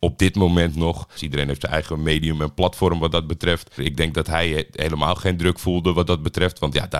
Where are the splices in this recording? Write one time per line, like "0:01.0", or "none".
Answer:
0:01.2
0:03.8